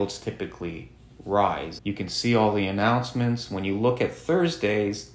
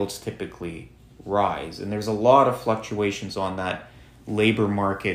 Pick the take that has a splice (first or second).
first